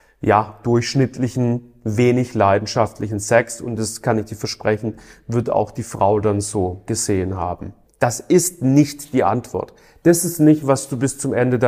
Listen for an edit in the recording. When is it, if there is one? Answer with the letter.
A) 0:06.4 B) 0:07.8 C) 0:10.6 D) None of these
B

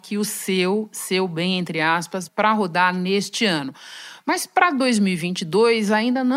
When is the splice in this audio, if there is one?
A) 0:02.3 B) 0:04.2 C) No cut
A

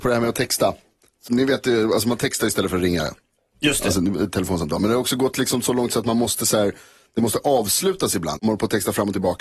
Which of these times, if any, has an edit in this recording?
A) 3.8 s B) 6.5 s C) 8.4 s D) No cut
C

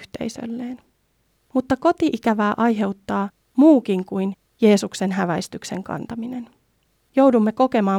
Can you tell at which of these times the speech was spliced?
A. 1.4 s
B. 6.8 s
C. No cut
C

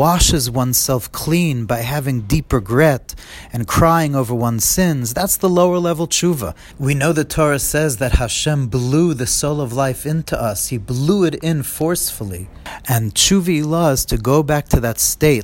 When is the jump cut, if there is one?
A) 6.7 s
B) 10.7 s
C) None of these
A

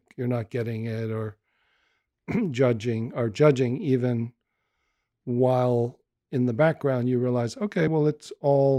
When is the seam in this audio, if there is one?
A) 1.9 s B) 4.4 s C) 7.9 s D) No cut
D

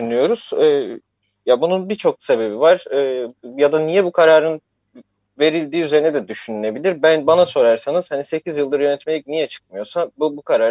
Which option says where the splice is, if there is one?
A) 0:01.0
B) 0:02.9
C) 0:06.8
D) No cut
D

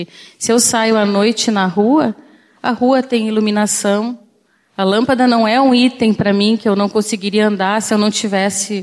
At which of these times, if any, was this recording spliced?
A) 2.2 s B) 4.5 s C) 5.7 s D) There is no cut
D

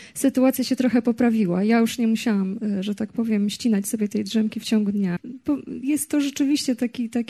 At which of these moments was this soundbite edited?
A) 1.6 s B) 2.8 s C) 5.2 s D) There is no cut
C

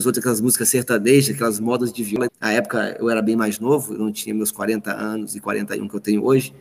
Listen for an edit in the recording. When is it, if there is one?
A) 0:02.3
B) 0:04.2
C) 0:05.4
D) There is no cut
A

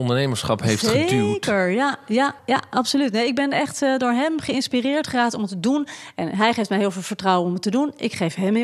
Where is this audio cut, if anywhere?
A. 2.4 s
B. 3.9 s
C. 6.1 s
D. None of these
A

